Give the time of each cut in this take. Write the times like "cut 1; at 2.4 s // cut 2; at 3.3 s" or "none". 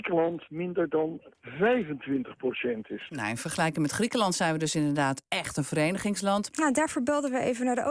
cut 1; at 3.1 s // cut 2; at 6.5 s